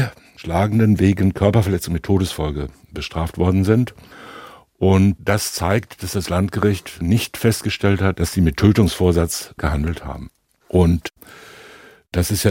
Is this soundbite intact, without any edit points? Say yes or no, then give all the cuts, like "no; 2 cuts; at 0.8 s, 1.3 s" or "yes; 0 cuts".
no; 1 cut; at 8.1 s